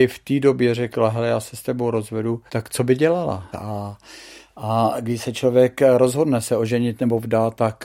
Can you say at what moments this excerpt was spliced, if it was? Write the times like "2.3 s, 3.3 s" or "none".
2.5 s, 3.5 s